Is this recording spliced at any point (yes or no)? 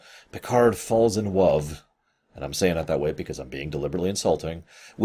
no